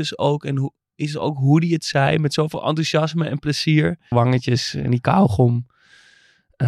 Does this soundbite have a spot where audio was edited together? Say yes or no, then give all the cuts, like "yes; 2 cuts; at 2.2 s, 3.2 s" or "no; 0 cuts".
yes; 1 cut; at 4.1 s